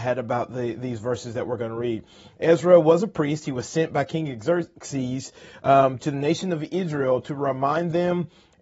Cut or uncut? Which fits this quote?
uncut